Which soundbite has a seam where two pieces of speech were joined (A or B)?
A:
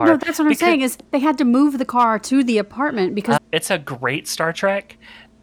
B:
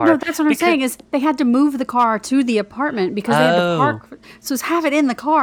A